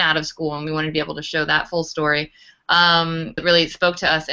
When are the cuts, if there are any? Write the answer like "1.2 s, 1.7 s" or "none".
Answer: 3.4 s